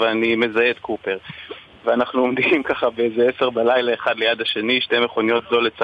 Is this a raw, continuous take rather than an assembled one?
yes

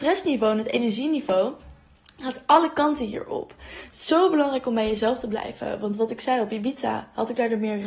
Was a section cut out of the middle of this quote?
no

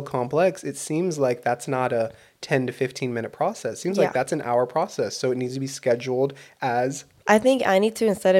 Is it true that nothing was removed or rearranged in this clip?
yes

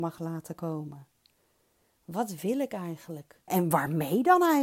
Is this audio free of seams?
no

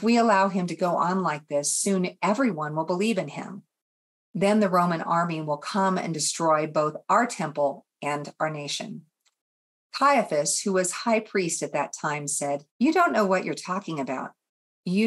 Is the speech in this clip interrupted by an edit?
yes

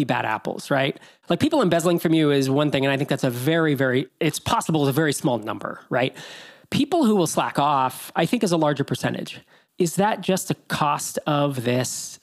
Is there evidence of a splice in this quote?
no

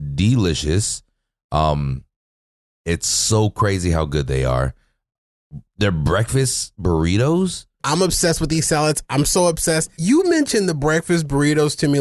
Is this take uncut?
no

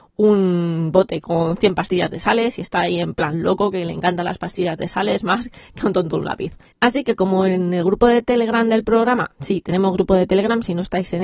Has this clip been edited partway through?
yes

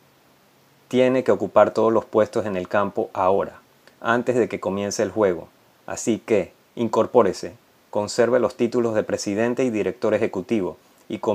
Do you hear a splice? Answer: yes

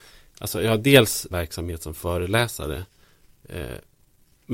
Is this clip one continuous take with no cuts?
no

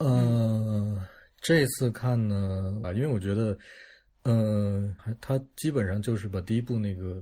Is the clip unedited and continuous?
no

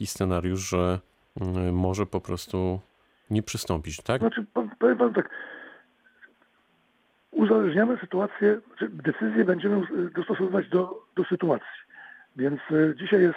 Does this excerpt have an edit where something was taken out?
yes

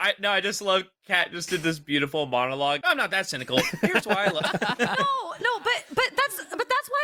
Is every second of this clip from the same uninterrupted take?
no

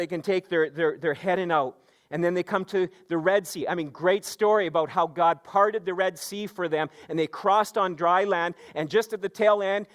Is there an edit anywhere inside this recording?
no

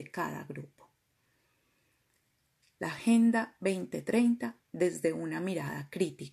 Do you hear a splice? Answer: yes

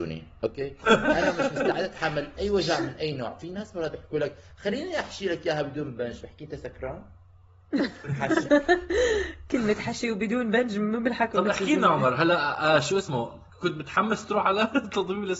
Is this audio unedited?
no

